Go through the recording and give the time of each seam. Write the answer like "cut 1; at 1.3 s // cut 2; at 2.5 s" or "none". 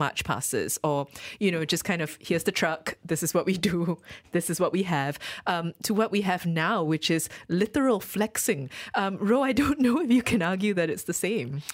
none